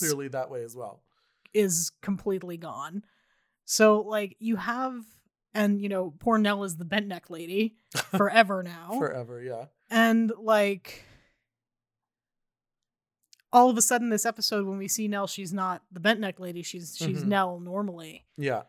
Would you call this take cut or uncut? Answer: uncut